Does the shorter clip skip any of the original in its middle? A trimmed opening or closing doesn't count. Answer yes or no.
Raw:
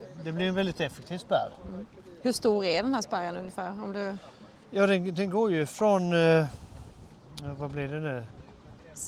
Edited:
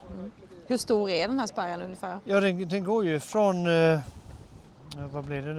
yes